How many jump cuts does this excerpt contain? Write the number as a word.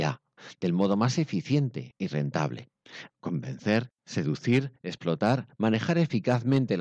one